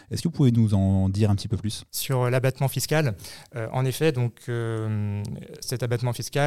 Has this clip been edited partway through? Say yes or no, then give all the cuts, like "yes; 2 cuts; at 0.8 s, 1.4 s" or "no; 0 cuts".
yes; 1 cut; at 1.9 s